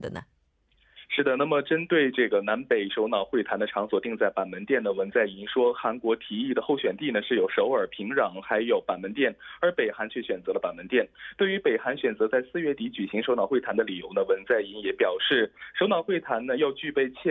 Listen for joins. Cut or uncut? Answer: uncut